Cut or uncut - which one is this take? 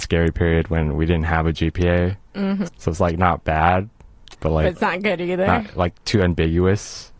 cut